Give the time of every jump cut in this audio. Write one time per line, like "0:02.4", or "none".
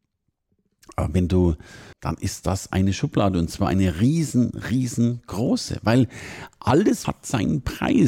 0:01.9
0:07.0